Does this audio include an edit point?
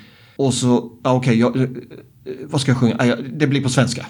no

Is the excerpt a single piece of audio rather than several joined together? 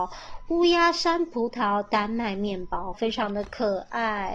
no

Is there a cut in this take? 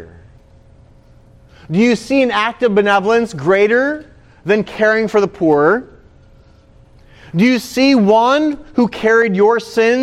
no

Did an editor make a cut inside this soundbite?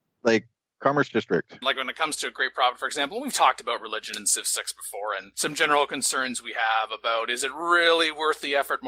yes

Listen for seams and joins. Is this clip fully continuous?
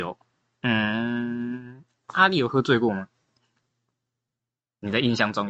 yes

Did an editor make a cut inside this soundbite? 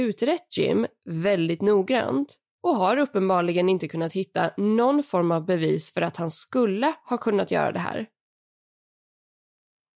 no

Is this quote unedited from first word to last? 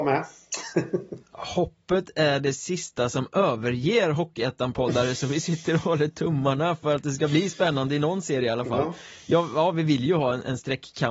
yes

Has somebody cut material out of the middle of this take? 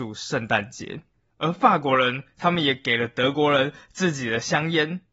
yes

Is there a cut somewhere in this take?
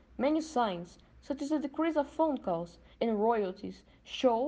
yes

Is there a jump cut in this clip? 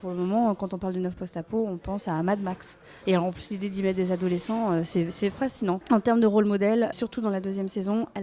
yes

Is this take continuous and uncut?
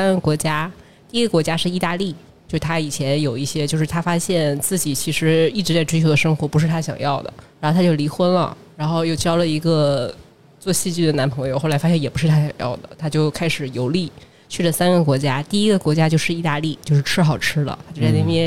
no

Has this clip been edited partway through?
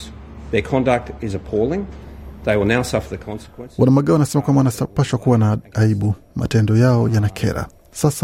no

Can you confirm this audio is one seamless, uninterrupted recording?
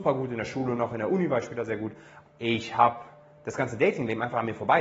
no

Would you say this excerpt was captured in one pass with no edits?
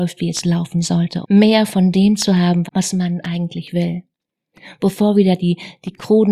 no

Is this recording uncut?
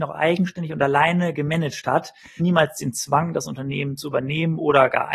no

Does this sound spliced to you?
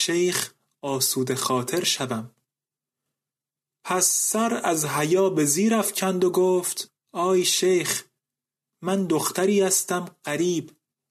no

